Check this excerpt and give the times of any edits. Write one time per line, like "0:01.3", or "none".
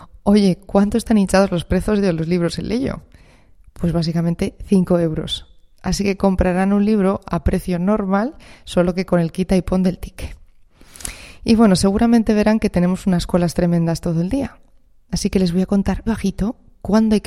0:16.1